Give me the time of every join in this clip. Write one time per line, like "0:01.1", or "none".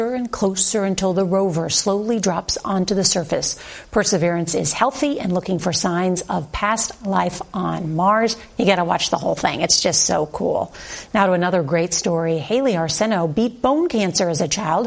none